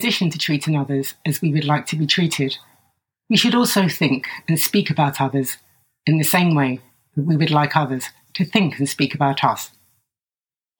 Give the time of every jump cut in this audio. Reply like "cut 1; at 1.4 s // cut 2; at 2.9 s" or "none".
none